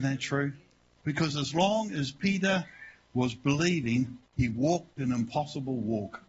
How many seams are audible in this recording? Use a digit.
2